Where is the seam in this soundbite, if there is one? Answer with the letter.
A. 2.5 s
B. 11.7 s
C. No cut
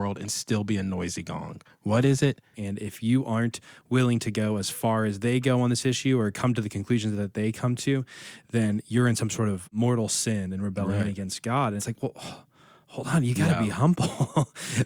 A